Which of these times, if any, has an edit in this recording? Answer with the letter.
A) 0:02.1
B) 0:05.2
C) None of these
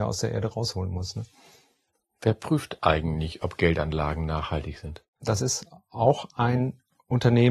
B